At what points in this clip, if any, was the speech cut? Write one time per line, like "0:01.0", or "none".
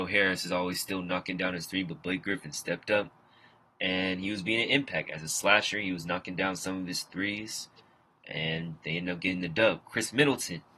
none